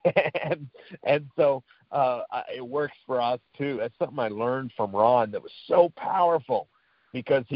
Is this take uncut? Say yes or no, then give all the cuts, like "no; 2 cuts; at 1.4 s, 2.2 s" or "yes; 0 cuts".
yes; 0 cuts